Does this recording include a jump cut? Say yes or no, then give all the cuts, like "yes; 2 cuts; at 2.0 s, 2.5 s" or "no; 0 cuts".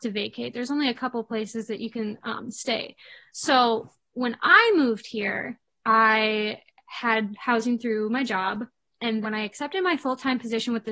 yes; 1 cut; at 9.2 s